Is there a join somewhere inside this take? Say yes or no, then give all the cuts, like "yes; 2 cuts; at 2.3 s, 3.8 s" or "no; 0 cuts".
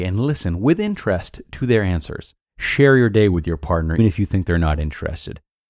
yes; 2 cuts; at 2.4 s, 4.0 s